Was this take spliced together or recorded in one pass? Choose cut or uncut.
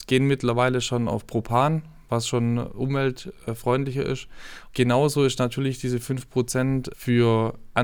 cut